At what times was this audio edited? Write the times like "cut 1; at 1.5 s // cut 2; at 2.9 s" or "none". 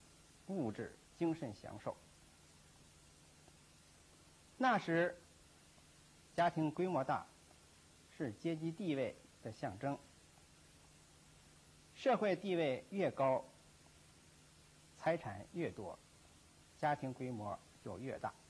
cut 1; at 1.1 s